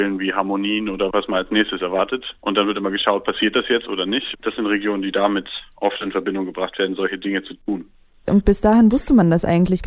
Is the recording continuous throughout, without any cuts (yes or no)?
yes